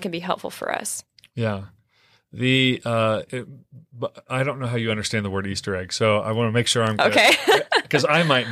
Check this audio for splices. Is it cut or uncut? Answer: cut